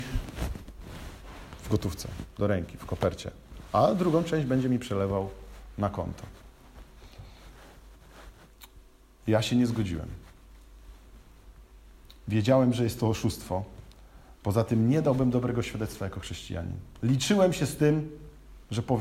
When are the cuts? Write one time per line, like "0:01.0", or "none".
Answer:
none